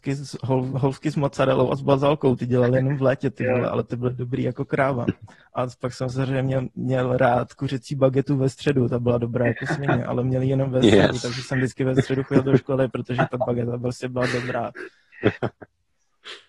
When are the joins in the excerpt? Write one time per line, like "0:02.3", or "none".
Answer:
none